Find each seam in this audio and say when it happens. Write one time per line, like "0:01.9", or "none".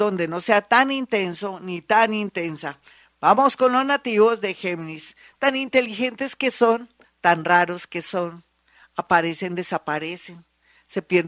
0:07.0

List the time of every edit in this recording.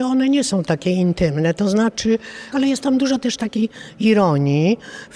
0:02.5

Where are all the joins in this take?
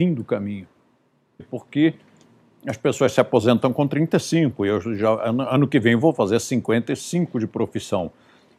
0:01.4

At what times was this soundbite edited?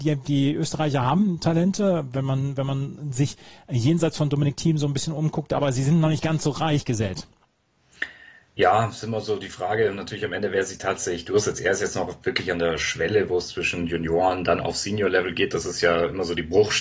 none

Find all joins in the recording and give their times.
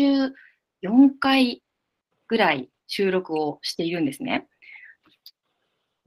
0:05.0

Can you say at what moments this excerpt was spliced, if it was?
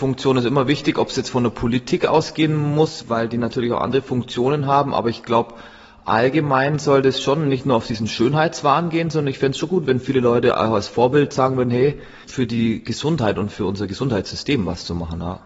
0:03.0
0:12.2

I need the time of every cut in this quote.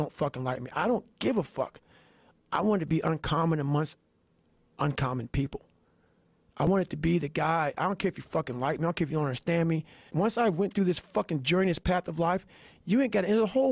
0:02.3
0:10.1

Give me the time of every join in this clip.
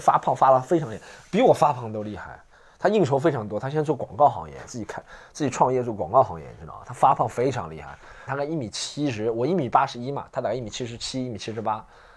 0:08.3

